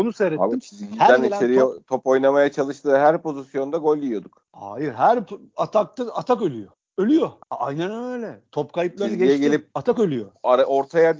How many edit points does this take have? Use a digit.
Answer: 1